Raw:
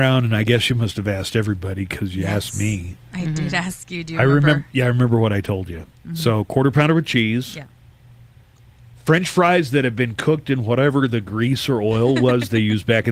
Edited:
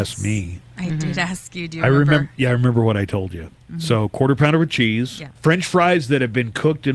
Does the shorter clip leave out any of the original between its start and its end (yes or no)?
yes